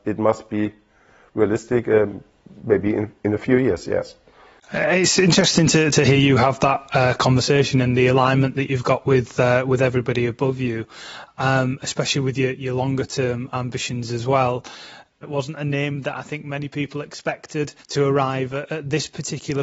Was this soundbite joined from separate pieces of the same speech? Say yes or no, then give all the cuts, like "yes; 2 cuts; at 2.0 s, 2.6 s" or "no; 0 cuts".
yes; 2 cuts; at 15.2 s, 17.8 s